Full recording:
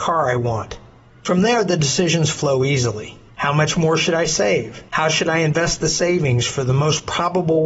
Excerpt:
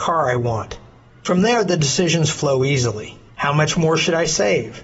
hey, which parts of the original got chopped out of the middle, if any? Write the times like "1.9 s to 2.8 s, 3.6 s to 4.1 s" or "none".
none